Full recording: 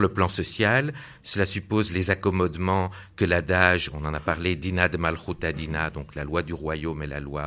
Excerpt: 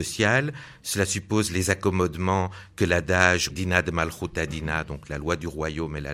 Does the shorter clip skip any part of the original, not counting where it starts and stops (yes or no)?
yes